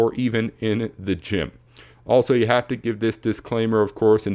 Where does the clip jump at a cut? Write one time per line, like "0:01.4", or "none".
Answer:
none